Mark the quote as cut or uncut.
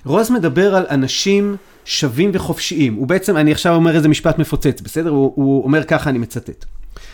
uncut